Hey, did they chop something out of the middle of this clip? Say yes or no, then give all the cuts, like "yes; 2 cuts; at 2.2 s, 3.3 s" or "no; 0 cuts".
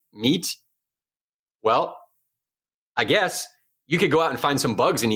no; 0 cuts